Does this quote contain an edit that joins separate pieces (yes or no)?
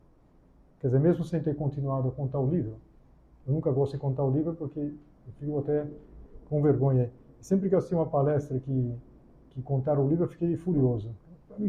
no